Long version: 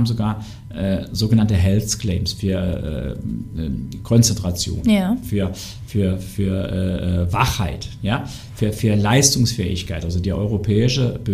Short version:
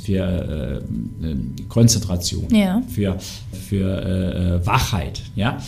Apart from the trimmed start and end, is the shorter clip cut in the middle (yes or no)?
yes